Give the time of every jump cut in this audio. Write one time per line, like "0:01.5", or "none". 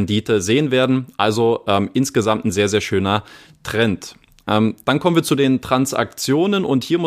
none